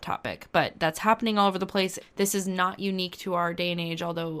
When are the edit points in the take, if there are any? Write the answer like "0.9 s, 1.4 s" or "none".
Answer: 2.0 s